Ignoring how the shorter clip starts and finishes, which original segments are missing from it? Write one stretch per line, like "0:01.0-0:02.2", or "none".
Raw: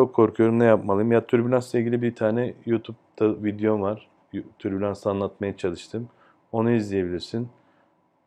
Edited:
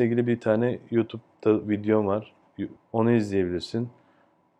0:04.5-0:06.4